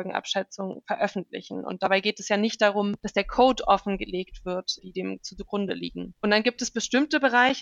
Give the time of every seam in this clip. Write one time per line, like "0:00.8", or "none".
0:04.8